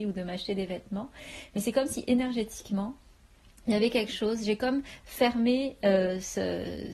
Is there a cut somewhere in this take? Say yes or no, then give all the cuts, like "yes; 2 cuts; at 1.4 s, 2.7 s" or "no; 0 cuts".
no; 0 cuts